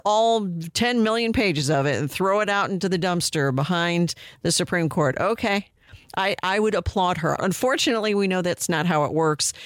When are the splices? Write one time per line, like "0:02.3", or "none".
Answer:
0:07.4

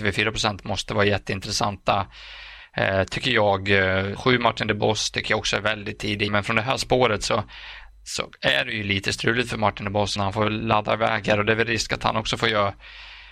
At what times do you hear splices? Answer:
0:04.2
0:06.3
0:10.2

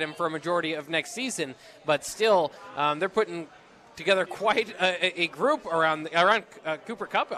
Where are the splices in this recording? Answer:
none

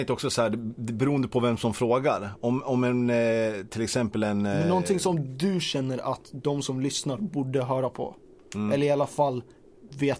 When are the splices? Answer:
none

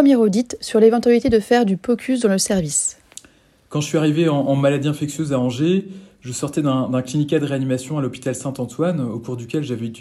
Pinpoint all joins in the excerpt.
none

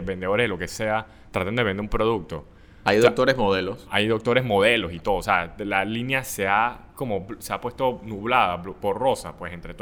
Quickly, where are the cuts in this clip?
none

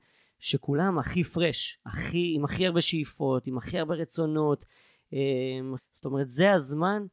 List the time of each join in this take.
0:05.8

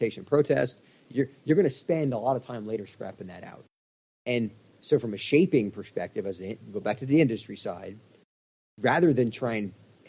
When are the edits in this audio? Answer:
none

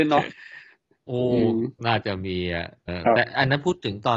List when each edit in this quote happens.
0:02.9

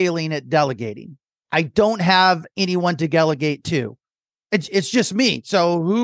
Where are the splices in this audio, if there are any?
0:01.4

